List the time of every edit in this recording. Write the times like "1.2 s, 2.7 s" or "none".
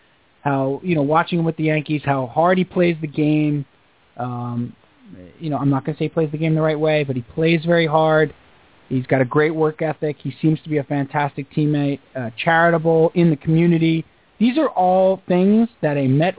none